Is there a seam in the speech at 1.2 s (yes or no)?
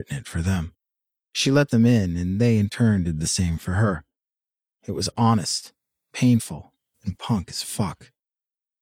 yes